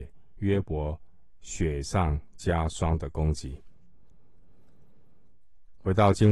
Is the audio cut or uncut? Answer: uncut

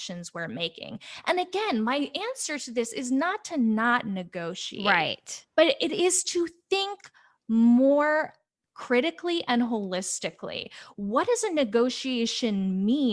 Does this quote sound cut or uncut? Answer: uncut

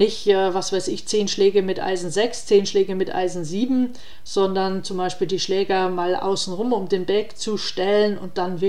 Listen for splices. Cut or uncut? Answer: uncut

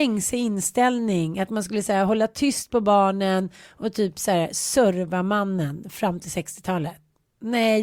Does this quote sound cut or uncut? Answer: uncut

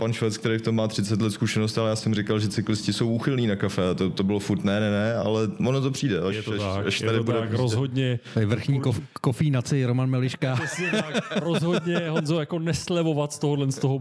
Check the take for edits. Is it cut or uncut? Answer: uncut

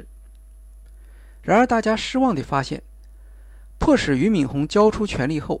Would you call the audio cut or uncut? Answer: uncut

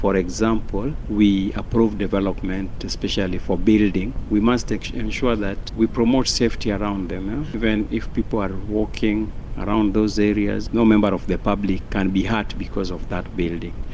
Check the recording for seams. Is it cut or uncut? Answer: uncut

